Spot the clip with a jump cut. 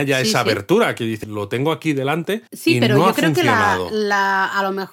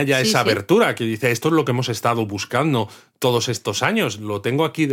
first; 2 cuts; at 1.2 s, 2.5 s

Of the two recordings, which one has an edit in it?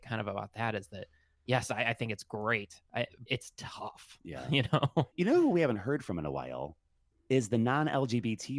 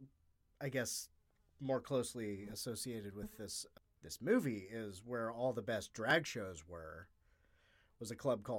first; 2 cuts; at 3.3 s, 5.1 s

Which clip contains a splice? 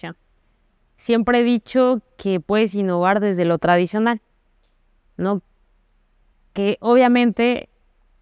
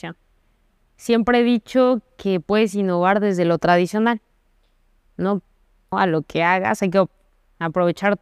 second; 1 cut; at 5.9 s

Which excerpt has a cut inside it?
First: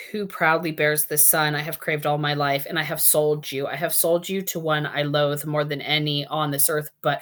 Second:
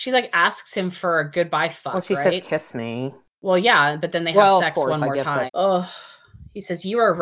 second; 1 cut; at 5.5 s

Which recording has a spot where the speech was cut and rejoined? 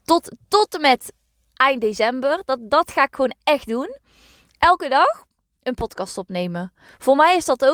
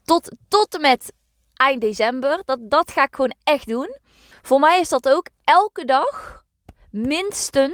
second; 1 cut; at 4.3 s

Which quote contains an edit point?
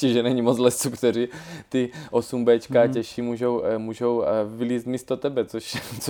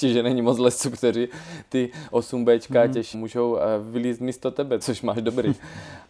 second; 2 cuts; at 3.1 s, 4.8 s

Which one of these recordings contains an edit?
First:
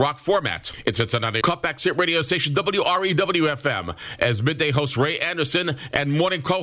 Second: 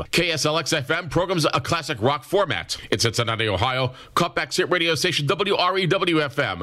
first; 1 cut; at 1.4 s

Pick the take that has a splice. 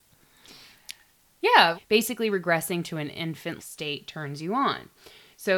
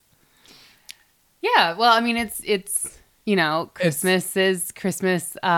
first; 2 cuts; at 1.7 s, 3.6 s

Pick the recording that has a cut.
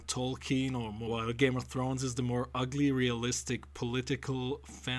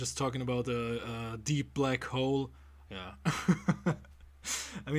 second; 1 cut; at 2.9 s

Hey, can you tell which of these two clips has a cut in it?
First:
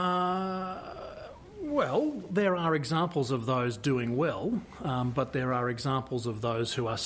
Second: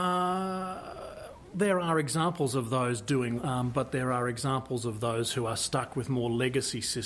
second; 2 cuts; at 1.5 s, 3.4 s

